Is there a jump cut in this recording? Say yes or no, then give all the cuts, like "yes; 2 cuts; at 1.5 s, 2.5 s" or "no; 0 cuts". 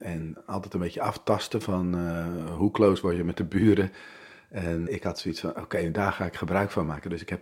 yes; 1 cut; at 4.9 s